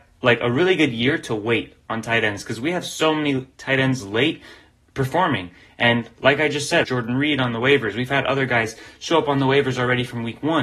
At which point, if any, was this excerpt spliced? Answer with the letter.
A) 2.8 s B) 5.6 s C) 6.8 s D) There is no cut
C